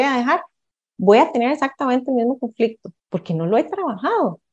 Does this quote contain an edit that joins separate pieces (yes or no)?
yes